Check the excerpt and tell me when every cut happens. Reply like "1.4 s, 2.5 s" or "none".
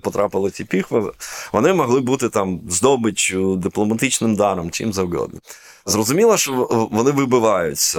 none